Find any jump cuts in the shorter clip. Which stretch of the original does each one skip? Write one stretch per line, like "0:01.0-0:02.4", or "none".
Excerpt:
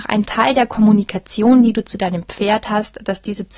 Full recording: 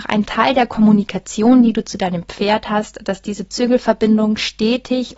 none